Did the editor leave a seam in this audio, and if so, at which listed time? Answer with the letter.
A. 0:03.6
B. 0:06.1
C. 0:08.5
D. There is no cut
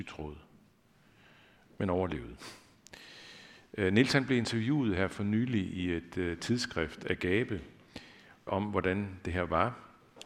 C